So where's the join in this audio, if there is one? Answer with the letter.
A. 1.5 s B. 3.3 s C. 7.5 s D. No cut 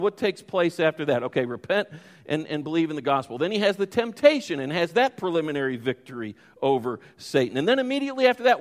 D